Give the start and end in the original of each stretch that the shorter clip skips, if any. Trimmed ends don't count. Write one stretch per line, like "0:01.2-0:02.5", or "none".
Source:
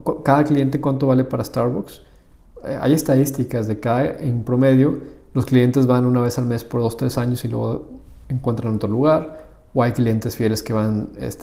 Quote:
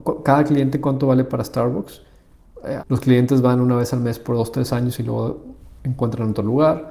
0:02.8-0:05.2